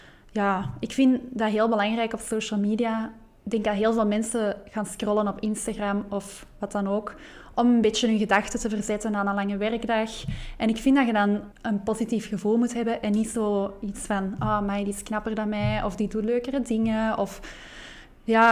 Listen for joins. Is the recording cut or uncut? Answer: cut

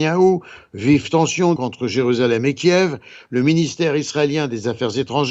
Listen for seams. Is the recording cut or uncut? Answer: cut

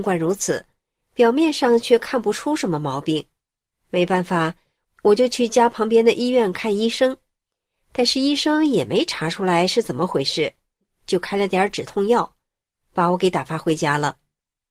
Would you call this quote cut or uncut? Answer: uncut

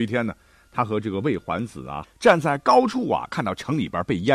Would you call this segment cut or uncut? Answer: cut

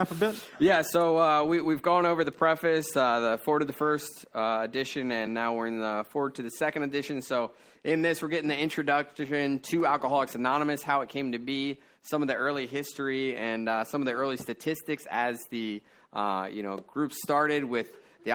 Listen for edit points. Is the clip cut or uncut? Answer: uncut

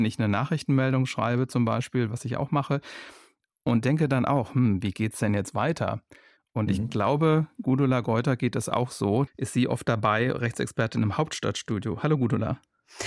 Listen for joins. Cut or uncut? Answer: cut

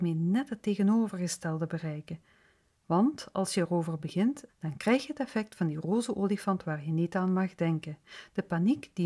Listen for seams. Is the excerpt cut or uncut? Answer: cut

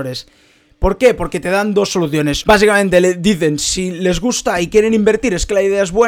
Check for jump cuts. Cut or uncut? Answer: uncut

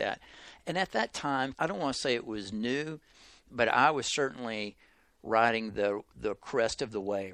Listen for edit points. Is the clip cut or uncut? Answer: cut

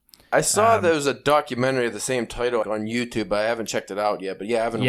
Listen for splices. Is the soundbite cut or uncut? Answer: cut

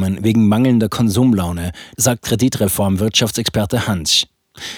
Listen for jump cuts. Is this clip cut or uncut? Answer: cut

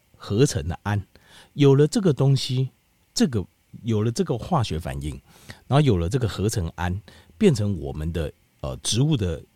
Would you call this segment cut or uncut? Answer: uncut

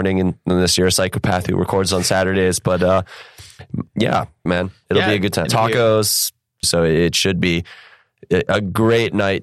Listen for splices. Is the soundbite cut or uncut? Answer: cut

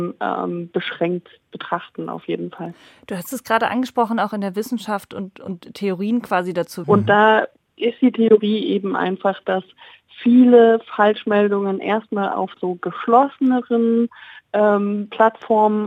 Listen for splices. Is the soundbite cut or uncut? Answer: cut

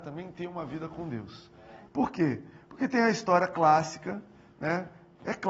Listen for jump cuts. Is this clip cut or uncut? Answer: cut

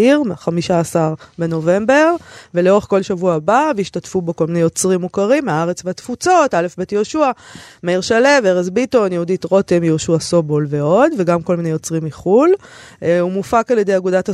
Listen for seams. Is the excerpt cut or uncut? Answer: uncut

